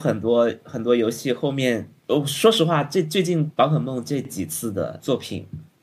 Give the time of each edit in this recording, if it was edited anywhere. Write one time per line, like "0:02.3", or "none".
0:02.0